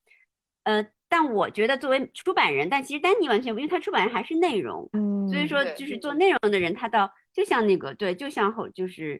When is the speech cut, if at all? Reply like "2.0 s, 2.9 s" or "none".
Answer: 4.9 s